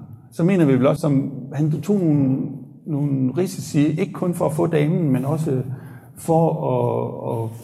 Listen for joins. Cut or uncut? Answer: cut